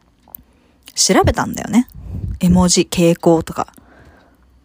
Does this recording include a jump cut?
no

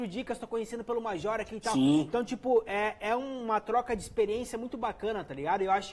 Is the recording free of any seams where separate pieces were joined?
yes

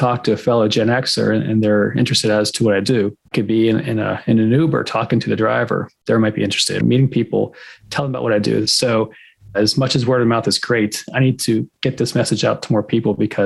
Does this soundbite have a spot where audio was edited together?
yes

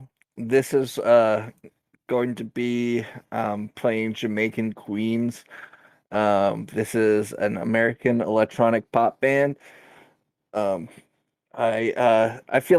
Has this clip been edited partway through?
no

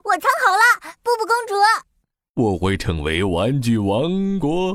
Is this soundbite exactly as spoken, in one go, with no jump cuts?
no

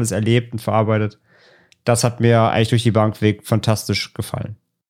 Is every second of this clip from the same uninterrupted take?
yes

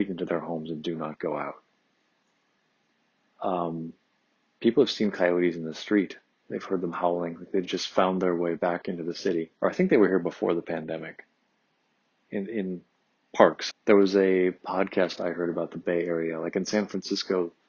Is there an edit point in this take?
yes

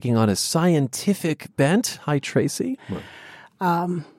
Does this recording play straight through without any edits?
no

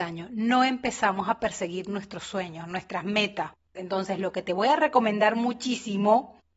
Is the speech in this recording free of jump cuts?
no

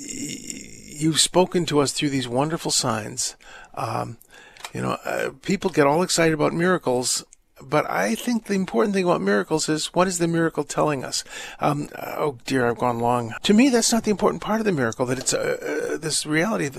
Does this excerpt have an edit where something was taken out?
yes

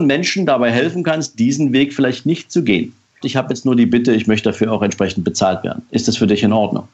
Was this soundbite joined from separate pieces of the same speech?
yes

